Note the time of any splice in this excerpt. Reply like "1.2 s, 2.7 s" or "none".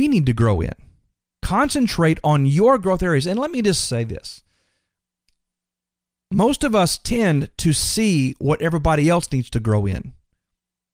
1.3 s